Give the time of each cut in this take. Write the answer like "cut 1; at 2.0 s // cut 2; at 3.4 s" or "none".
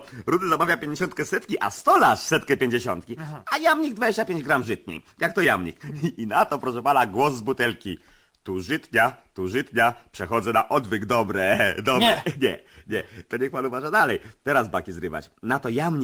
none